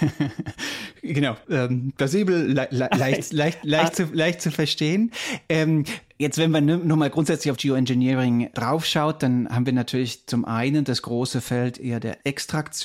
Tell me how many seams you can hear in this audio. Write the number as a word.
one